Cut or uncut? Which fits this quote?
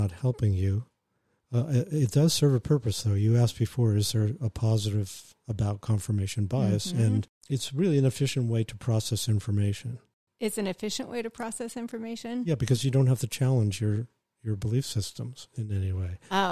uncut